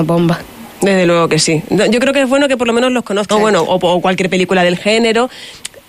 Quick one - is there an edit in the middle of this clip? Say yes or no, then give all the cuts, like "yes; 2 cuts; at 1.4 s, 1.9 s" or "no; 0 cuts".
yes; 1 cut; at 3.3 s